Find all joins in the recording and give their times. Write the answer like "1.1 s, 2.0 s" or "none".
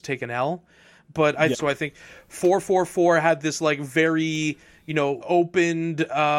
1.5 s, 5.2 s